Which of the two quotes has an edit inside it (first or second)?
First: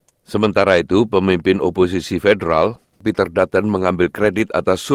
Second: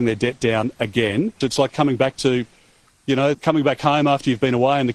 second